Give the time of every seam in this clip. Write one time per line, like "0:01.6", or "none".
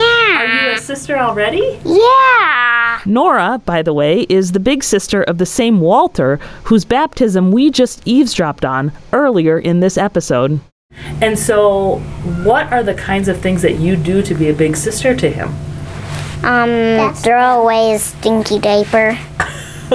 none

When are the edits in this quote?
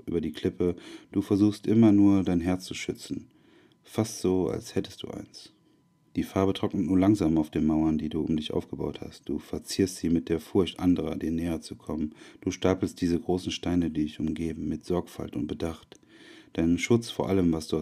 none

